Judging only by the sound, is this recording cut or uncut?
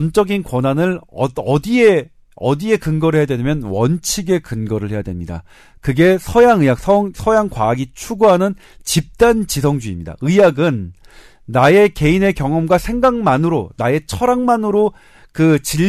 uncut